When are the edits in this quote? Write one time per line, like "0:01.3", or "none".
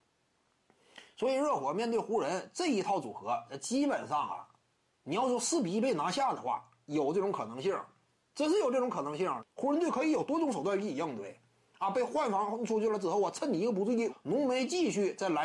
0:09.4
0:14.1